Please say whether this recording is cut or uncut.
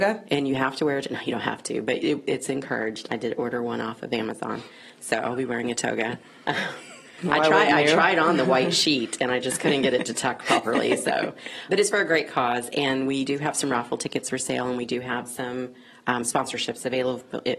cut